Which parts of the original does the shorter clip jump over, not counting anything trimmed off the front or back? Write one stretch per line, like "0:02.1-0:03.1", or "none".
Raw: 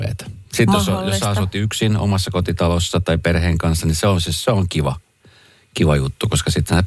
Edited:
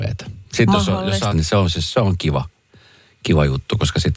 0:01.3-0:03.8